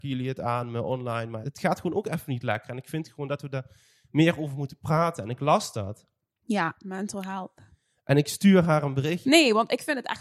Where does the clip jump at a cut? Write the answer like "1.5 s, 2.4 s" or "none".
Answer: 1.4 s, 9.2 s